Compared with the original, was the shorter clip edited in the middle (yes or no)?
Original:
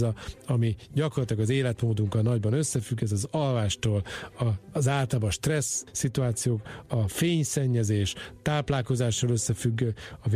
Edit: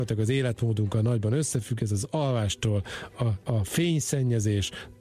yes